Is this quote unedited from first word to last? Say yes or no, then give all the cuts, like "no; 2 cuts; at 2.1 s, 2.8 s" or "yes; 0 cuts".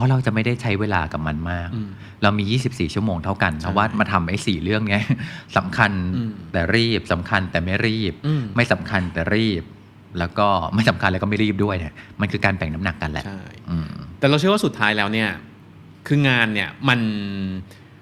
yes; 0 cuts